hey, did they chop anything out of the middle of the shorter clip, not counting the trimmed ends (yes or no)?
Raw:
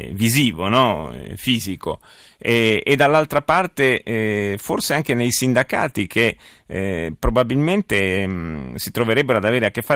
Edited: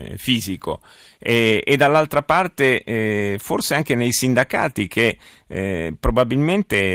no